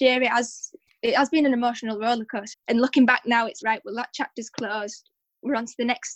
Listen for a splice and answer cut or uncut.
cut